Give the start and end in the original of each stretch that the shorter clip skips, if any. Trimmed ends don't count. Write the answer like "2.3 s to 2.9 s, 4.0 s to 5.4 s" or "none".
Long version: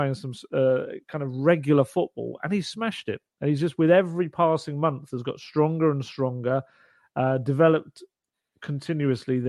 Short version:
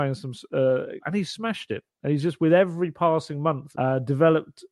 1.0 s to 2.4 s, 5.1 s to 7.1 s